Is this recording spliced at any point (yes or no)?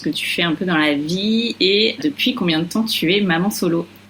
yes